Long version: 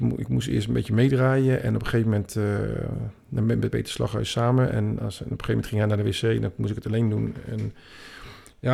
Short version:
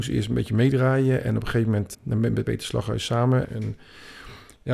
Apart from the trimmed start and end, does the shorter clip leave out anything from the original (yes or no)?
yes